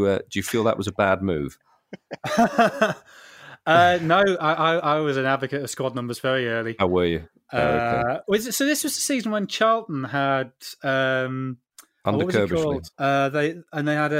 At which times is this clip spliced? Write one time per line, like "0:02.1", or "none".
0:12.9